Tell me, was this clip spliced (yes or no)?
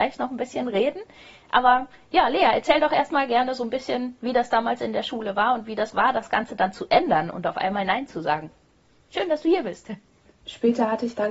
yes